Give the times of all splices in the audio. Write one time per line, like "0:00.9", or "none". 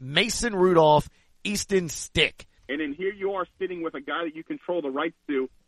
0:02.6